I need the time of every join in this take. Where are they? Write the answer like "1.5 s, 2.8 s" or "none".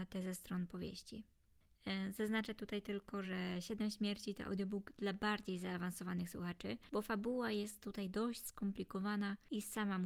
none